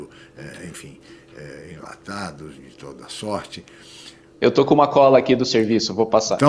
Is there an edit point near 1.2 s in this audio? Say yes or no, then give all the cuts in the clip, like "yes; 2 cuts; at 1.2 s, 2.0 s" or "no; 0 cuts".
no; 2 cuts; at 2.6 s, 4.3 s